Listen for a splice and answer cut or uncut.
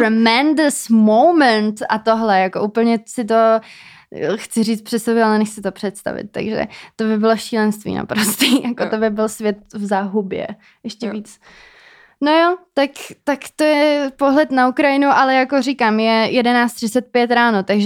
uncut